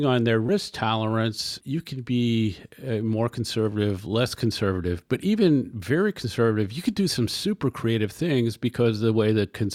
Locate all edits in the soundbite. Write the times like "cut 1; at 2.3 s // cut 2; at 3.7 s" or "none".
none